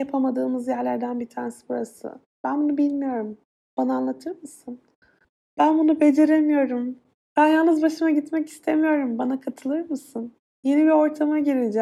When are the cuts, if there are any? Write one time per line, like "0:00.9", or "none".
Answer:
0:07.2